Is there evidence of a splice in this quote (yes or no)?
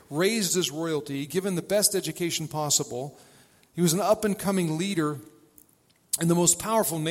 no